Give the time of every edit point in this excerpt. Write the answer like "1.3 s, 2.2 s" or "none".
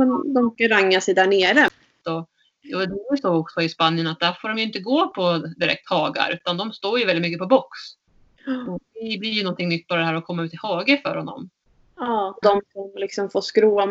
2.0 s, 12.4 s